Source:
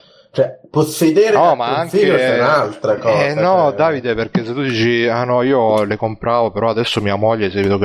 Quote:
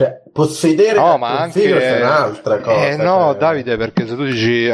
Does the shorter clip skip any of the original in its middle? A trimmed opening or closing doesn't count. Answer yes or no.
no